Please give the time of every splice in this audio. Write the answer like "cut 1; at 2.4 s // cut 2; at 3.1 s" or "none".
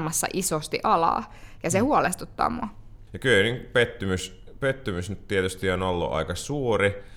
cut 1; at 3.1 s